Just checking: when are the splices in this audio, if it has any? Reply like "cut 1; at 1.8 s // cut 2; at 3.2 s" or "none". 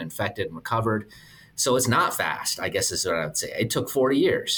none